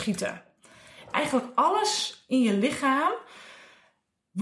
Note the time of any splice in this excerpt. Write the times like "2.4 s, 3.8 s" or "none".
1.1 s